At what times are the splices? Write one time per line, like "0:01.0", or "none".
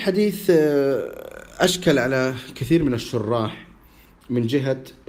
none